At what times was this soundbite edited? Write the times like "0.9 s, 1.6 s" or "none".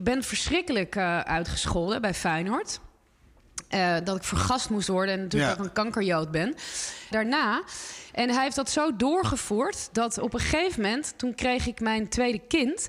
7.1 s